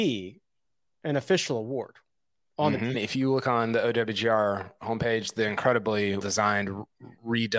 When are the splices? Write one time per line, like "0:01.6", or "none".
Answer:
0:02.9
0:06.2